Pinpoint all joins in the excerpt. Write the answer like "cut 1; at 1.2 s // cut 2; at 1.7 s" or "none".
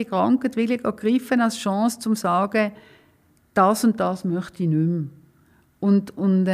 none